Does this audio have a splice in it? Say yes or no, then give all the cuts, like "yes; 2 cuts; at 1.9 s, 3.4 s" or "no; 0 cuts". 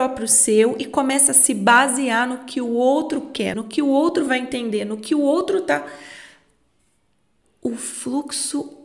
yes; 1 cut; at 3.5 s